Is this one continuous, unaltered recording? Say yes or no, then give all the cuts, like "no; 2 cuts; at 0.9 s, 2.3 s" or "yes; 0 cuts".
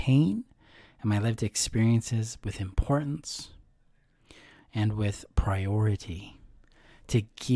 yes; 0 cuts